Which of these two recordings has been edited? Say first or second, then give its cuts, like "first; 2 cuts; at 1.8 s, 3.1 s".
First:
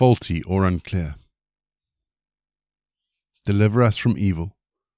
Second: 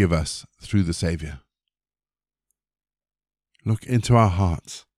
second; 1 cut; at 3.5 s